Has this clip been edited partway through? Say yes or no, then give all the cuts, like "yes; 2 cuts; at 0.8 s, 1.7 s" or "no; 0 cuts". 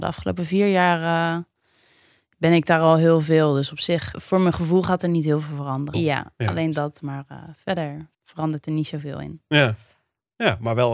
yes; 3 cuts; at 4.1 s, 5.9 s, 8.1 s